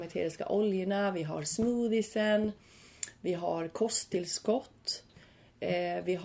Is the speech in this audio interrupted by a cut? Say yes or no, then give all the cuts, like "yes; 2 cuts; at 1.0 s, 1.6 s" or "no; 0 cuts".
no; 0 cuts